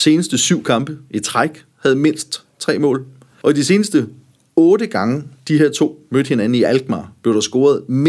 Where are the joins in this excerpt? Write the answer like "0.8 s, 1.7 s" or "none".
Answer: 3.4 s